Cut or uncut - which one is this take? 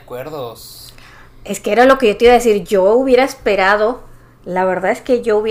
uncut